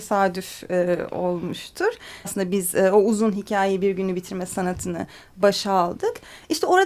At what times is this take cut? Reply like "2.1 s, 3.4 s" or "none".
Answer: 2.2 s